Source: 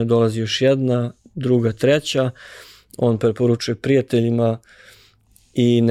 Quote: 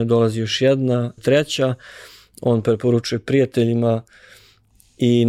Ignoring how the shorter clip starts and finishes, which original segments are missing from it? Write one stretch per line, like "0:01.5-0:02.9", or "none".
0:01.2-0:01.7